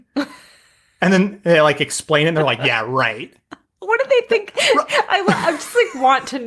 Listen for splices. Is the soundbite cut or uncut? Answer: uncut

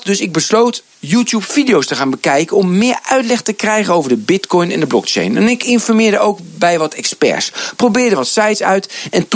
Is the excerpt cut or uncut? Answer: uncut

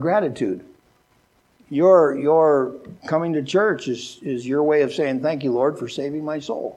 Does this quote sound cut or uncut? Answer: uncut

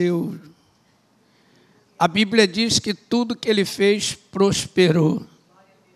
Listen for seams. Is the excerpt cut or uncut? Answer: uncut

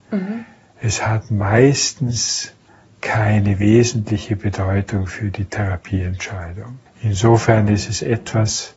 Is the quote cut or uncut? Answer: cut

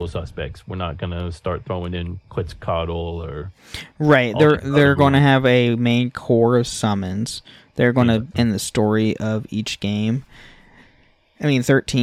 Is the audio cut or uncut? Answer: cut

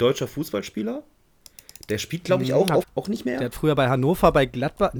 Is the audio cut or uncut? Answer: cut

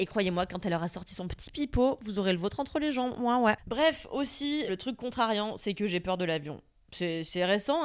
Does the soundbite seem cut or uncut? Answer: cut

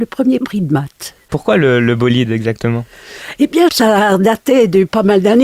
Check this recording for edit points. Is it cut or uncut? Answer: cut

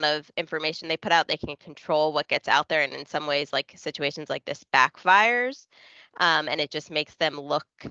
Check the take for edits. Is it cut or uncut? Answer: uncut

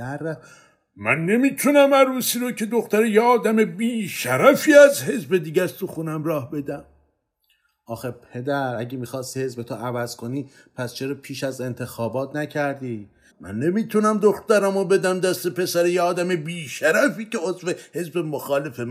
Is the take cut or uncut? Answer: cut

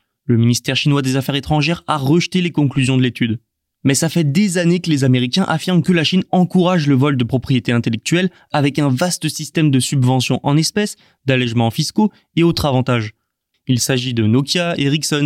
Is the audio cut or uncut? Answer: cut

